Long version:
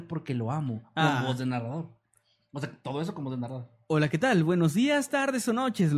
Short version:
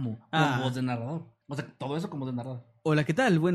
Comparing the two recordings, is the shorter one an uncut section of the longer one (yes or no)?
no